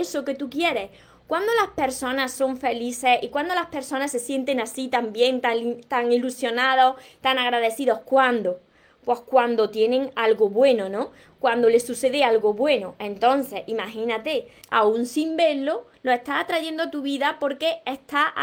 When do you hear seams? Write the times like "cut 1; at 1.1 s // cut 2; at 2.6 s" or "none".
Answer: cut 1; at 14.6 s // cut 2; at 15.9 s